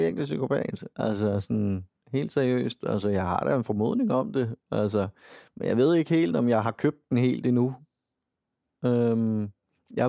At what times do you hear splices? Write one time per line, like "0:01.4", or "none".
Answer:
none

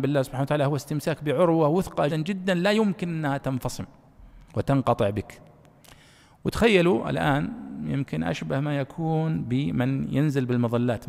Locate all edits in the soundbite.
0:02.1
0:04.5

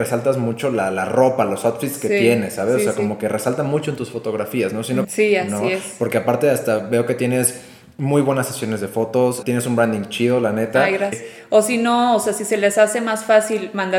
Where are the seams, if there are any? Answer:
0:05.0
0:09.4
0:11.1

